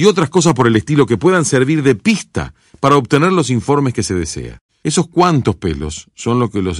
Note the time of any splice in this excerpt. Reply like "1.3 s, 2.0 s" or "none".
4.7 s